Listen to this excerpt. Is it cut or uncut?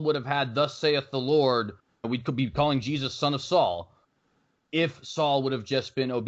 uncut